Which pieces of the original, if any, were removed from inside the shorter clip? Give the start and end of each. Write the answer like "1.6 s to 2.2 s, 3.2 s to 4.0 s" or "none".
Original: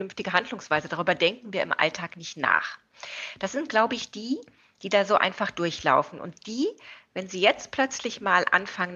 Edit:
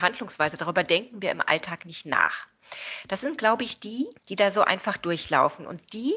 4.5 s to 4.7 s

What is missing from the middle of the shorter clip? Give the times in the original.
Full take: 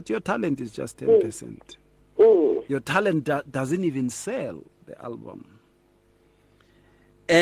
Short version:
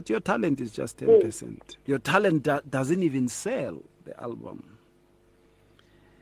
1.9 s to 2.7 s

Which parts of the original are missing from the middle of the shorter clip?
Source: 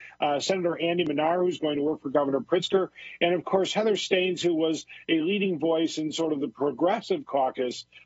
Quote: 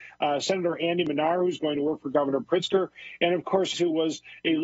3.7 s to 4.4 s

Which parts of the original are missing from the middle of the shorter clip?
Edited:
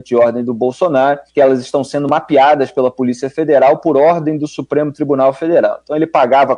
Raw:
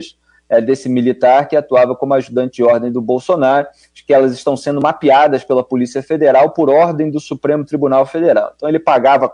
3.8 s to 4.0 s

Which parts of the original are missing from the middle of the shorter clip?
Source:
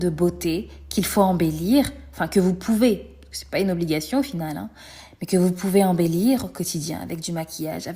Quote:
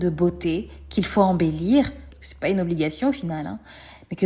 2.1 s to 3.2 s

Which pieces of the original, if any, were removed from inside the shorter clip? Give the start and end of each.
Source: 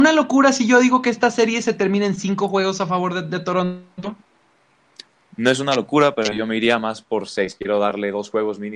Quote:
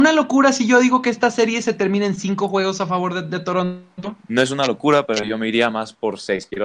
4.2 s to 5.3 s

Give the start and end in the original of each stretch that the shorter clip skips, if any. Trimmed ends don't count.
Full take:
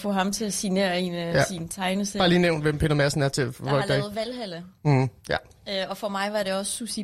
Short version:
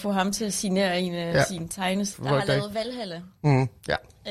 2.1 s to 3.5 s

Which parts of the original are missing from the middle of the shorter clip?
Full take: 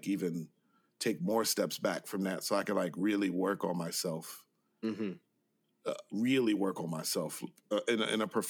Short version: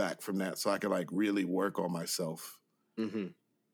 none

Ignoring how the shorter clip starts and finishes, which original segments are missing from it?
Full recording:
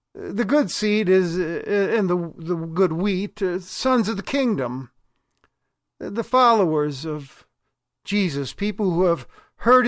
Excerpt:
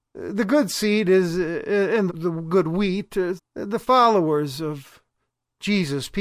2.1 s to 2.3 s, 3.6 s to 5.8 s

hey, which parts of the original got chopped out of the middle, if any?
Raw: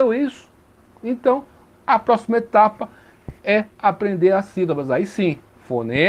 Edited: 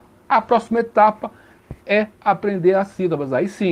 none

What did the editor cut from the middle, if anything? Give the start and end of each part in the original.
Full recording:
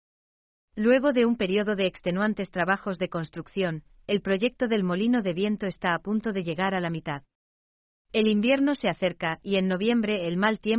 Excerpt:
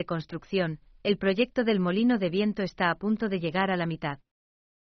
none

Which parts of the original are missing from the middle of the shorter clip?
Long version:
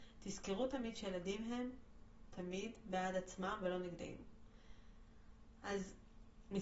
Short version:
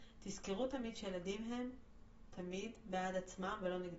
none

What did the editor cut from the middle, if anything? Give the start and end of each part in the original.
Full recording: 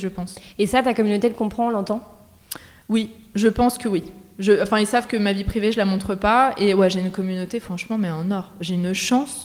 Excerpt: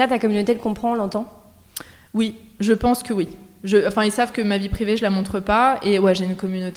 none

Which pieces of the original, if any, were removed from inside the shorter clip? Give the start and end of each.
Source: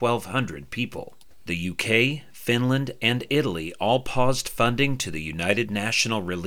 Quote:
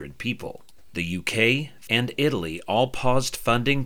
2.4 s to 3.0 s

